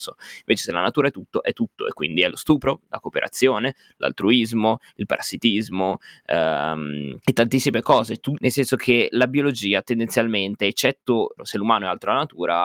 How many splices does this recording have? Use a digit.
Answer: 3